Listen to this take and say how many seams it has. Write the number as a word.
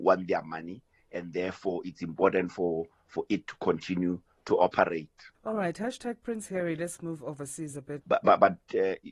two